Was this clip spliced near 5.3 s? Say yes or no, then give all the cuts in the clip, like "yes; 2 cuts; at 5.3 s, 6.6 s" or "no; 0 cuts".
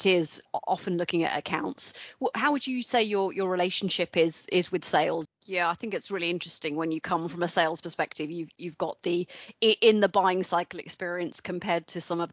yes; 1 cut; at 5.3 s